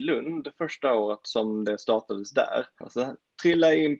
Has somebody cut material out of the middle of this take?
yes; 1 cut; at 2.8 s

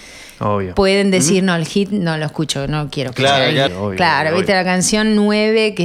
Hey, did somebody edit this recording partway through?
yes; 1 cut; at 3.7 s

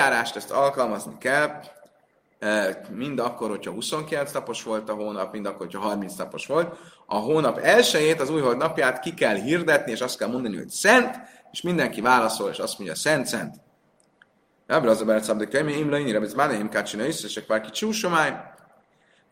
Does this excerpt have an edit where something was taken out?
no; 0 cuts

